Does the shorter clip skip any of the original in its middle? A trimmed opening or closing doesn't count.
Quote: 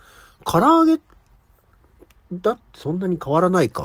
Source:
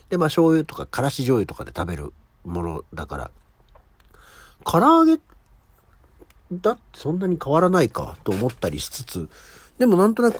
no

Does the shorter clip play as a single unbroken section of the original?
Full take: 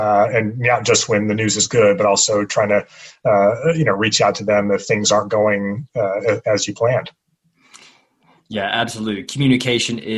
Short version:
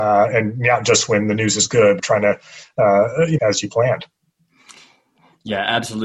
no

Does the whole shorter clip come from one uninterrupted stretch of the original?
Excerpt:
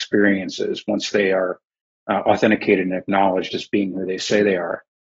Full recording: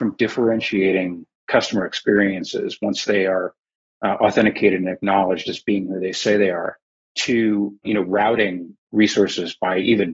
yes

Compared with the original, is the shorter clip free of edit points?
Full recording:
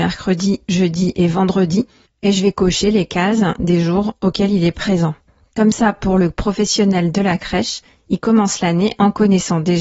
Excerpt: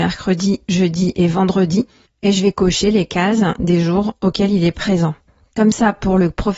yes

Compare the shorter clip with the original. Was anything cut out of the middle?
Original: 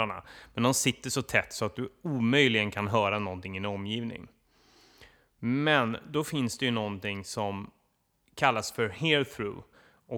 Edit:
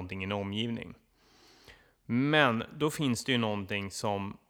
no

